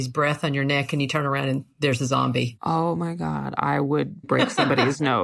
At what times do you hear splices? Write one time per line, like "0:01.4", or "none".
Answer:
0:04.2